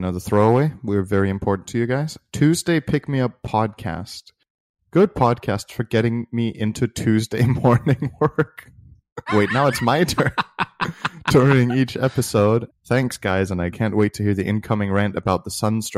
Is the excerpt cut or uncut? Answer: cut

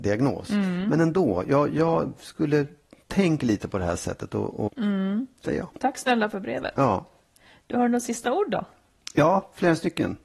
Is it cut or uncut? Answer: cut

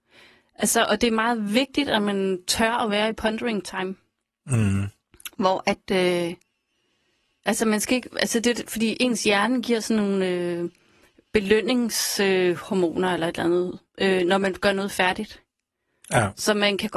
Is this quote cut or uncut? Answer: uncut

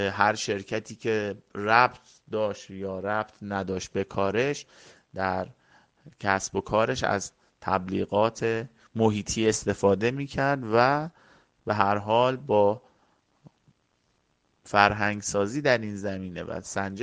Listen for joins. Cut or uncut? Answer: uncut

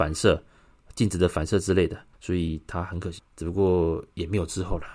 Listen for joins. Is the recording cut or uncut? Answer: cut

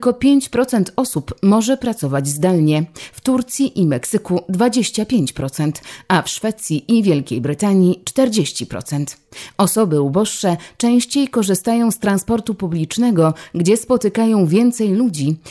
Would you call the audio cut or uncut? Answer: uncut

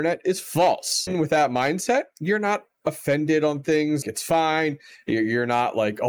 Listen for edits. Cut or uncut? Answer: cut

